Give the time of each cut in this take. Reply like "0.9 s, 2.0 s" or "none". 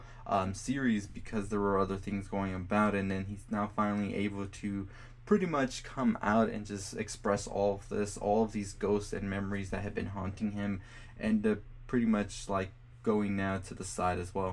none